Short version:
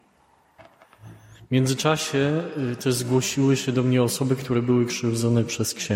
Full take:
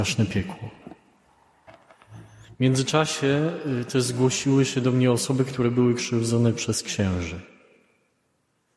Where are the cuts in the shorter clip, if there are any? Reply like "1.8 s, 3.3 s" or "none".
none